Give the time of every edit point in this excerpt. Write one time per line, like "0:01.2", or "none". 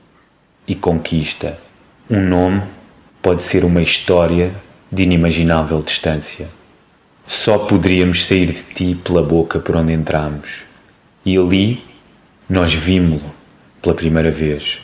0:03.1